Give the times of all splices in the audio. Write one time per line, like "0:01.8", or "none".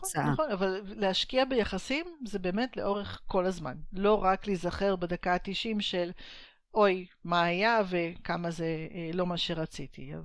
none